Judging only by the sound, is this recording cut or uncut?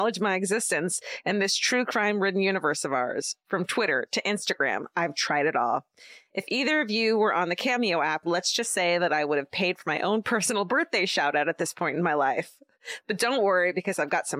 uncut